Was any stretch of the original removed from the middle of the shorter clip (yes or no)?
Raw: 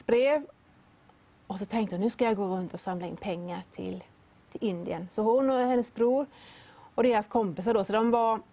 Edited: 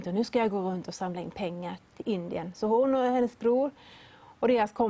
yes